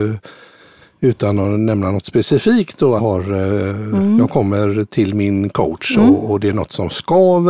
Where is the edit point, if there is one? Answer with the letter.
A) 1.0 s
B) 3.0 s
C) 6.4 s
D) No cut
B